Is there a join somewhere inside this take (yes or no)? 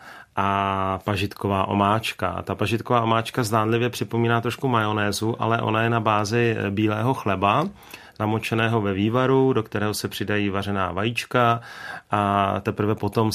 no